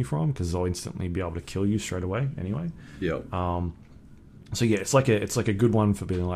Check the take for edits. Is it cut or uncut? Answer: uncut